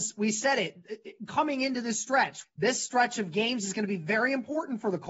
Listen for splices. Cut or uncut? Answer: cut